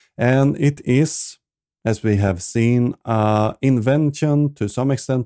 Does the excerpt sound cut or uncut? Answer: uncut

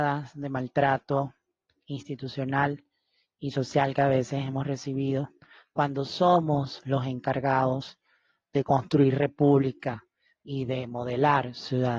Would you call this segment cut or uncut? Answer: uncut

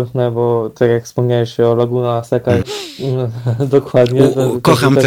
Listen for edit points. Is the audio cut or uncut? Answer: cut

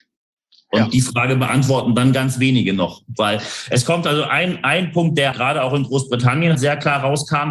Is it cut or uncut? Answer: cut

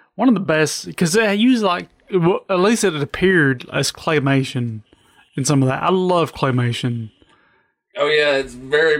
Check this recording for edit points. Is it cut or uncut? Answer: uncut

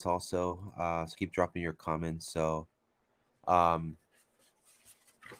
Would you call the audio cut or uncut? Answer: cut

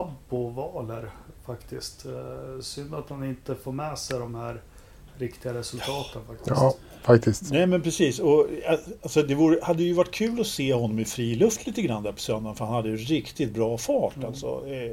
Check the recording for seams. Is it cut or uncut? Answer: uncut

